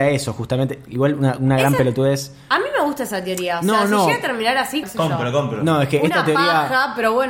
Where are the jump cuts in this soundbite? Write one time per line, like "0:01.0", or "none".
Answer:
0:04.8

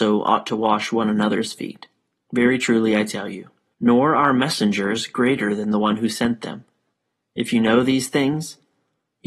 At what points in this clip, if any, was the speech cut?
0:02.3
0:03.7

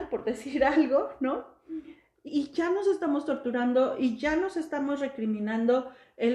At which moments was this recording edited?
0:02.3

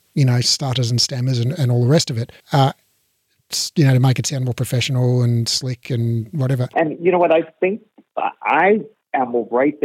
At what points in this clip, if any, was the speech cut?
0:02.4
0:06.7

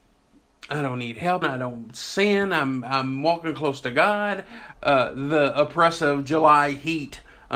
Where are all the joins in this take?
0:01.4
0:04.7

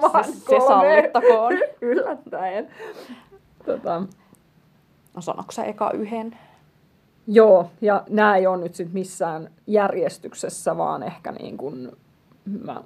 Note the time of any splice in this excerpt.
none

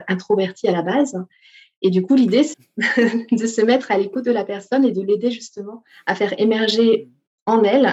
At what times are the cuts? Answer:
0:02.5

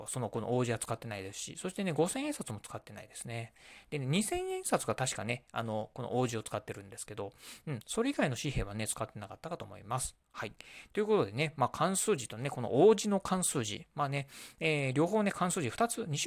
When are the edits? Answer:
none

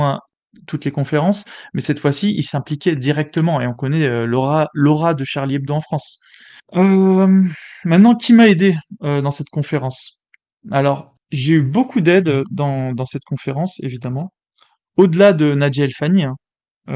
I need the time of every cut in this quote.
0:06.6

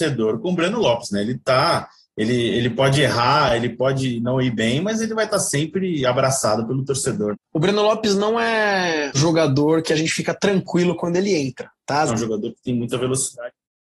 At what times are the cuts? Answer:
0:07.3
0:09.1
0:12.1

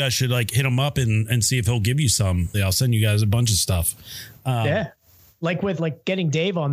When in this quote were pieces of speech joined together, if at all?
0:02.5
0:05.8

